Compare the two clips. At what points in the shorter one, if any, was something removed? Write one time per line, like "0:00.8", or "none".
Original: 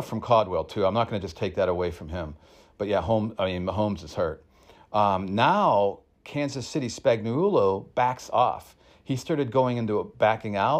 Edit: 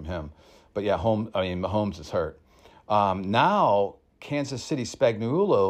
none